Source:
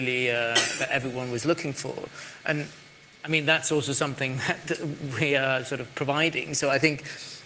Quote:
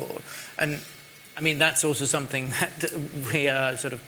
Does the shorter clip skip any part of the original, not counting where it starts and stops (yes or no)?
no